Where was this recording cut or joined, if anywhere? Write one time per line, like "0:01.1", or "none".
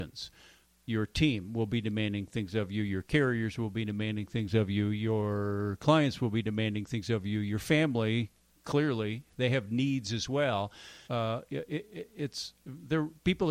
0:11.1